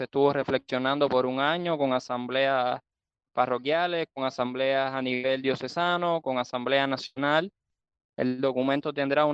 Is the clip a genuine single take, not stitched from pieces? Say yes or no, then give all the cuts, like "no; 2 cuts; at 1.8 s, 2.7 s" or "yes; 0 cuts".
yes; 0 cuts